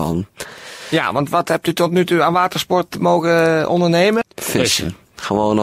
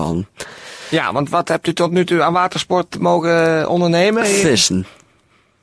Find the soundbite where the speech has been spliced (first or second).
first